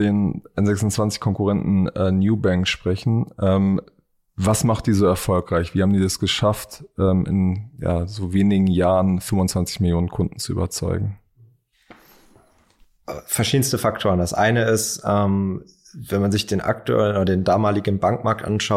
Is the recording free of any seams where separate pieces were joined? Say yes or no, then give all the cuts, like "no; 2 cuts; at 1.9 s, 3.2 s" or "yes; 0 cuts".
yes; 0 cuts